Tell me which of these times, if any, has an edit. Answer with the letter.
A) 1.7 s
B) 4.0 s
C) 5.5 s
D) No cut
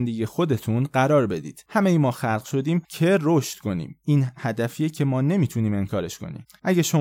D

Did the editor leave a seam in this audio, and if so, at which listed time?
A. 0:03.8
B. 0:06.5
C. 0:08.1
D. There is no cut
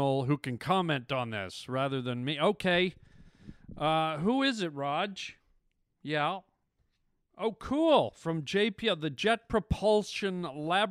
D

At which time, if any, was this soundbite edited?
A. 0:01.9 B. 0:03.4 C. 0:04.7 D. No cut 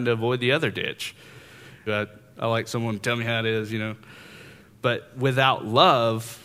A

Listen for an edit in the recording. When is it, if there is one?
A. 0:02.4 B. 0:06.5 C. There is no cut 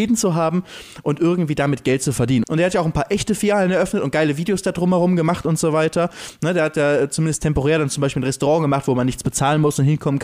A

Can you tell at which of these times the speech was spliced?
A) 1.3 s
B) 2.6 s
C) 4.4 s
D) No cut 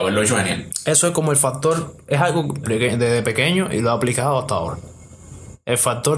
B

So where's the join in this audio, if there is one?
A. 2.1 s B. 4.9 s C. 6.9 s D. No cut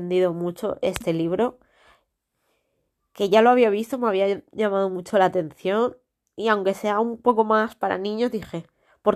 D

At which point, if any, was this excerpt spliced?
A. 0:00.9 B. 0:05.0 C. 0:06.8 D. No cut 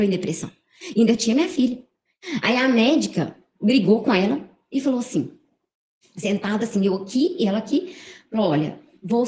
D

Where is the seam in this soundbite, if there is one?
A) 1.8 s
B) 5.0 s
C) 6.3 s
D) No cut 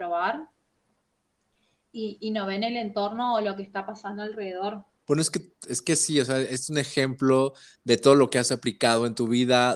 B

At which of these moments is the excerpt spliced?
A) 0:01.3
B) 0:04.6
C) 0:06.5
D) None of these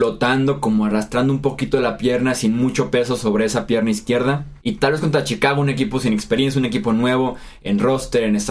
B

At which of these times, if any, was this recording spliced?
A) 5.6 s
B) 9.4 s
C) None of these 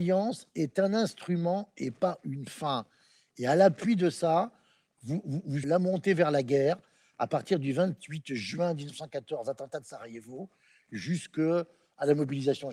A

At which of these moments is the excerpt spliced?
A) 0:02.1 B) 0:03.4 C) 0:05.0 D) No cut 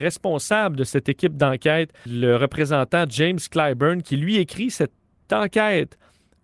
A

